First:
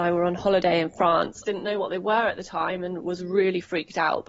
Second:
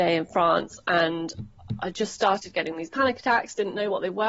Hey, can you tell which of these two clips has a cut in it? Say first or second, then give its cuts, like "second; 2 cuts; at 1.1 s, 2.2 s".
first; 1 cut; at 1.4 s